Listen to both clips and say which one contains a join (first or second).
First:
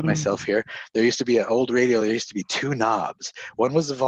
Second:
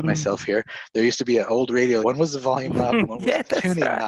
second